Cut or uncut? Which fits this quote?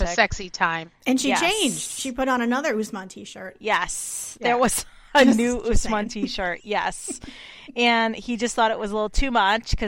uncut